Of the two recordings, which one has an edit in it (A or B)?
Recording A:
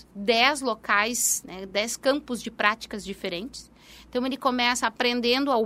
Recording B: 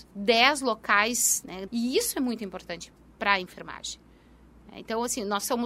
B